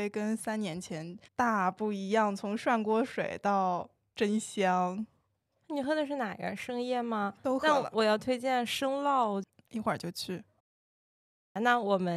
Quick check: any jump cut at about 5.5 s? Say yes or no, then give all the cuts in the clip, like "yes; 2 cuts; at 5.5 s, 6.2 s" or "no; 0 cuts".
no; 1 cut; at 1.3 s